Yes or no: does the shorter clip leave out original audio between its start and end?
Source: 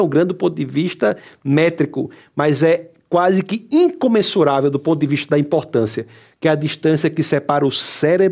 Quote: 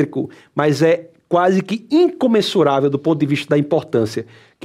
no